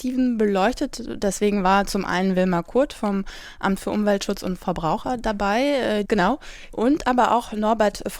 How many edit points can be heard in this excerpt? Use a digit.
1